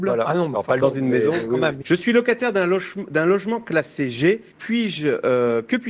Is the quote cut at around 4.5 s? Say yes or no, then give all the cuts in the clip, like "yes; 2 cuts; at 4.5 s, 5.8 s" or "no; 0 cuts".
yes; 2 cuts; at 1.8 s, 4.5 s